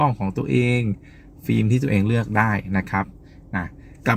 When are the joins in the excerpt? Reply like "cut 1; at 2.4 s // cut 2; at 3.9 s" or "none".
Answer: none